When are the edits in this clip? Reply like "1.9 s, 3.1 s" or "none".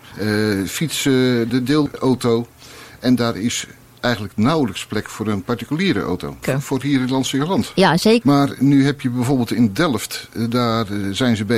1.5 s, 6.4 s, 8.2 s